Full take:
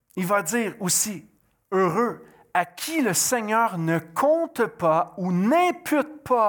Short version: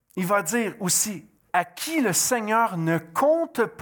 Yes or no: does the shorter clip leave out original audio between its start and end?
yes